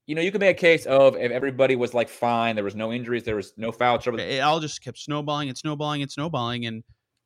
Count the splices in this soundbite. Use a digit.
1